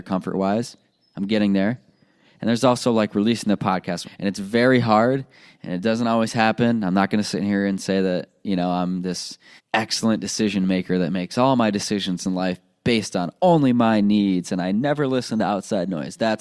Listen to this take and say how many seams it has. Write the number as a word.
two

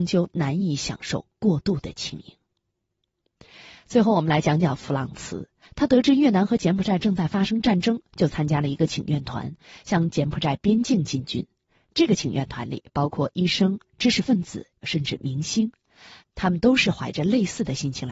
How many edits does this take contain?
two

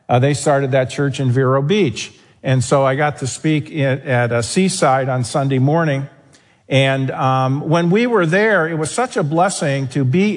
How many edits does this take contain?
zero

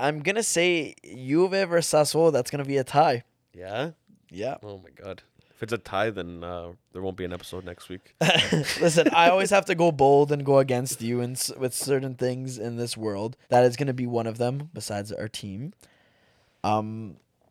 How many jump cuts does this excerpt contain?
two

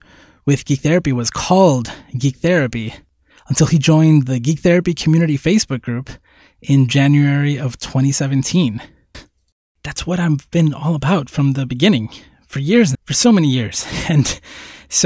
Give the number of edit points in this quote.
two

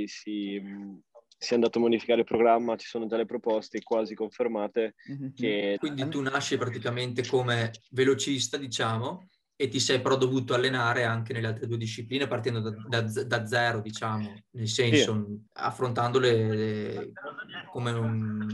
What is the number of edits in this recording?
two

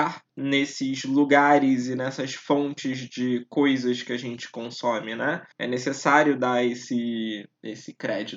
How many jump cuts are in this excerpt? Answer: one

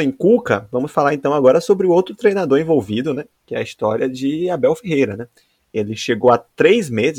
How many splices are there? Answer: one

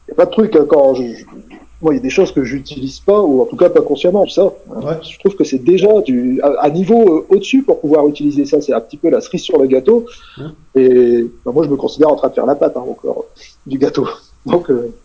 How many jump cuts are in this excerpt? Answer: one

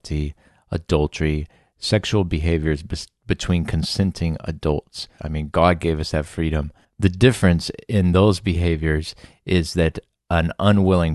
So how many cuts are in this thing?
two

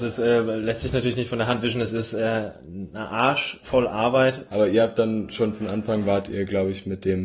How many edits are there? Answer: one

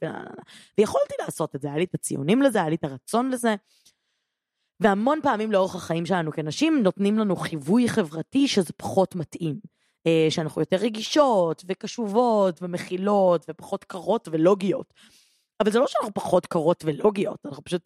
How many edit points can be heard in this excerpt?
zero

